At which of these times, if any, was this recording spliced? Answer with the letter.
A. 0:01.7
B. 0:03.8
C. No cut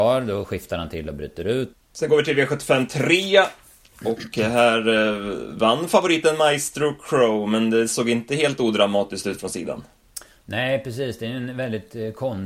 A